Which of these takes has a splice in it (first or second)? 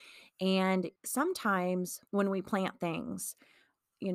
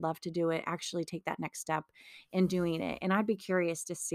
first